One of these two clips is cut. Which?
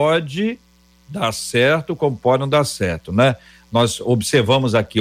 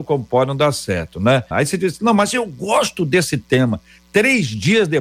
second; 1 cut; at 1.5 s

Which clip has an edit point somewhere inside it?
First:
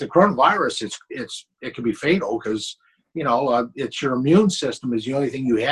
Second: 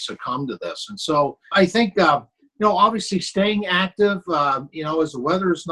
second; 1 cut; at 1.5 s

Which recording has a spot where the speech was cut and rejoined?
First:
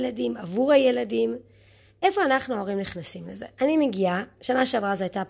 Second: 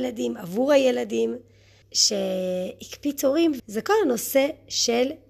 second; 2 cuts; at 1.8 s, 3.6 s

